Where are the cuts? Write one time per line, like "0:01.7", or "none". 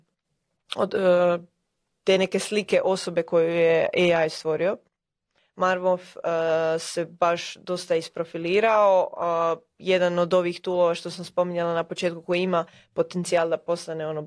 0:05.4